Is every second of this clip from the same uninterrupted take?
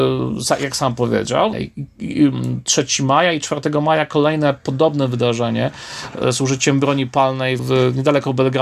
no; 2 cuts; at 1.5 s, 7.6 s

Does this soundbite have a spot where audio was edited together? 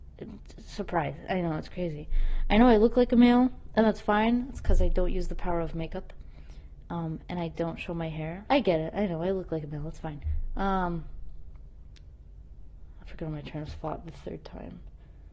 yes; 1 cut; at 8.5 s

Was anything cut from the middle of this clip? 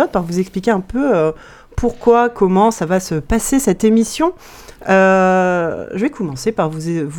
no; 0 cuts

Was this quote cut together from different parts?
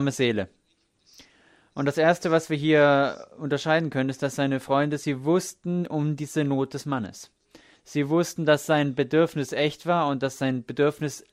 yes; 1 cut; at 7.7 s

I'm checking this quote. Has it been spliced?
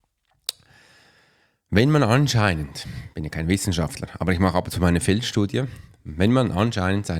no; 0 cuts

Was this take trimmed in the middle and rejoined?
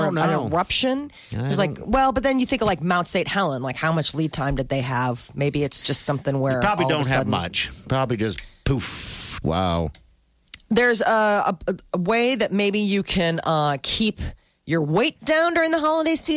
yes; 1 cut; at 9.4 s

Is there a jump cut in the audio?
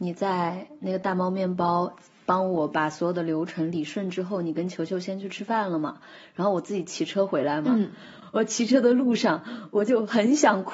no; 0 cuts

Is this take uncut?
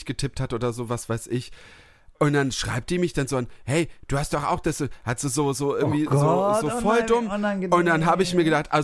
yes; 0 cuts

